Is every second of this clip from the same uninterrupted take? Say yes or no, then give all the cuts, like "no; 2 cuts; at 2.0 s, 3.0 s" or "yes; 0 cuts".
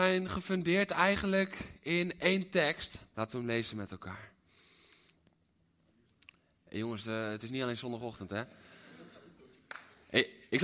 no; 1 cut; at 3.1 s